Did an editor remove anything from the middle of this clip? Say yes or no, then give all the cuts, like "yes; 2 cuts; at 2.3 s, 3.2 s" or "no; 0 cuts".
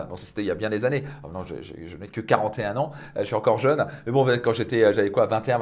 no; 0 cuts